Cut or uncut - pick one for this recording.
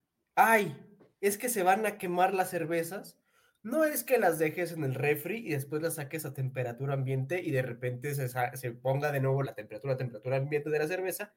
cut